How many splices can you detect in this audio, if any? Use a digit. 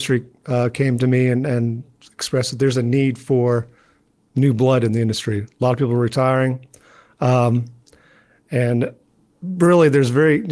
0